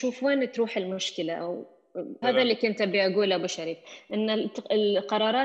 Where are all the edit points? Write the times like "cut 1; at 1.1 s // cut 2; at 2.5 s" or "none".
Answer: cut 1; at 2.2 s